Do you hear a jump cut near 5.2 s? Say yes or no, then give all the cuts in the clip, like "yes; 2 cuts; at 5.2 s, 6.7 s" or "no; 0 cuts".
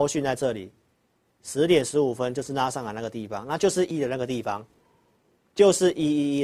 no; 1 cut; at 3.9 s